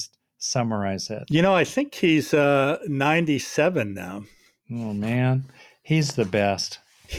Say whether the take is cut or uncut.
uncut